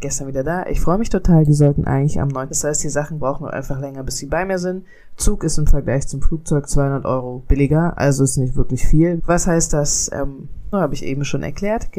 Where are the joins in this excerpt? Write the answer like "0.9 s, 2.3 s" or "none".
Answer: 2.5 s, 9.2 s, 10.7 s